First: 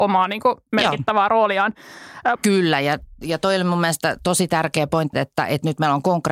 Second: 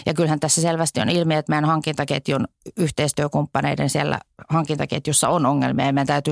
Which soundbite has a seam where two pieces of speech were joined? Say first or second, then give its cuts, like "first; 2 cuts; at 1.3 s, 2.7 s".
first; 2 cuts; at 2.4 s, 5.1 s